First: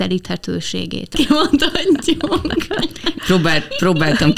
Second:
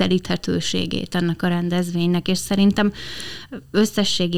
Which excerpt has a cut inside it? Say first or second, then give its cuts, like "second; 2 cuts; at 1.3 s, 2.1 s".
first; 1 cut; at 1.1 s